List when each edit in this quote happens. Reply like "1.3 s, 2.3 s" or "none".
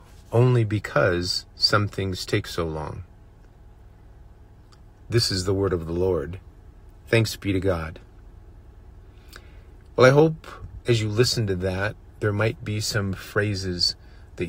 5.1 s